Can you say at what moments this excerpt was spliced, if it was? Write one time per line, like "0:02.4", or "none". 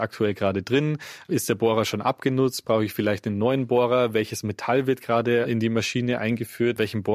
none